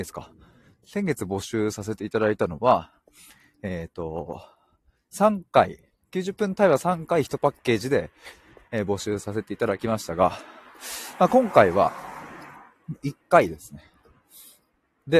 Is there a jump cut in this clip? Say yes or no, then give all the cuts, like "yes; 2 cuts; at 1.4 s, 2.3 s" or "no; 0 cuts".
no; 0 cuts